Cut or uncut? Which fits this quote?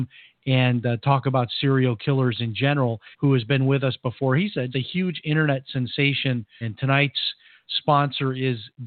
cut